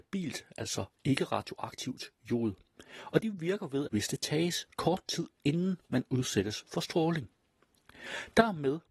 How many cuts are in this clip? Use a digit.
1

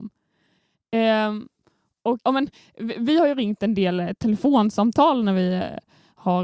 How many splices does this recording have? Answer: 1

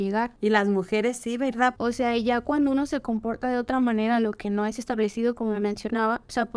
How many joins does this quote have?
1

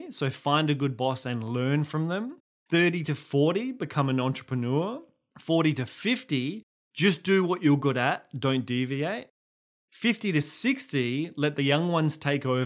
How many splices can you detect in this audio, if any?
0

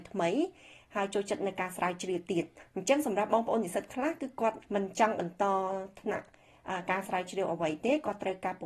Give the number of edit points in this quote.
1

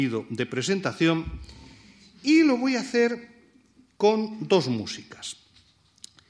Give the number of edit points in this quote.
0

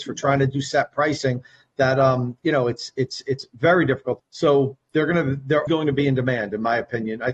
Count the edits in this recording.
2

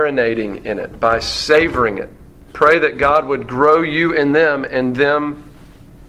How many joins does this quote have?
1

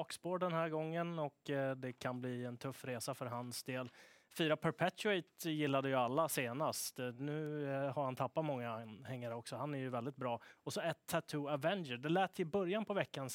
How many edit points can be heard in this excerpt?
0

